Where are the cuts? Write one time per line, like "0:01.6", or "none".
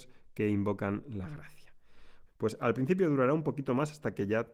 0:02.3